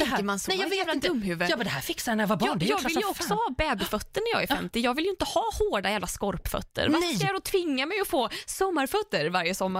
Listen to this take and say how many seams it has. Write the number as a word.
zero